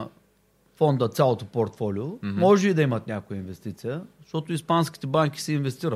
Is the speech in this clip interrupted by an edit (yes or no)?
no